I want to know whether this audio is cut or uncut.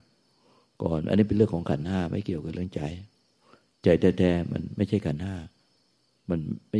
uncut